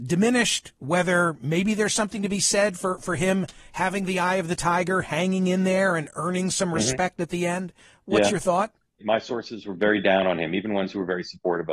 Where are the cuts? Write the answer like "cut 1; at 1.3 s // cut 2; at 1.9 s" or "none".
cut 1; at 9.0 s